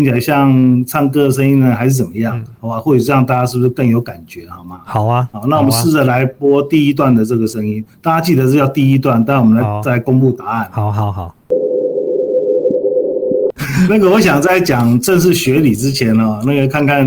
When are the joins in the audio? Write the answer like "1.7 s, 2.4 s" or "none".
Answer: 13.6 s